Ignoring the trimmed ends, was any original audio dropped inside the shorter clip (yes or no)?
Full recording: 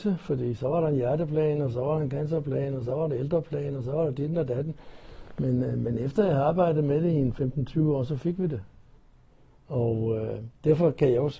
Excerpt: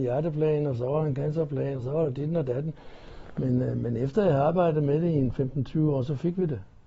yes